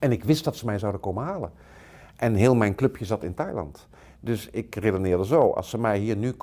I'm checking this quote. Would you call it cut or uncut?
uncut